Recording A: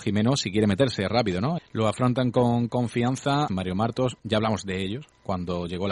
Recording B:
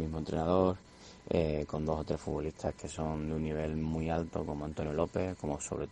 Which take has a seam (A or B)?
A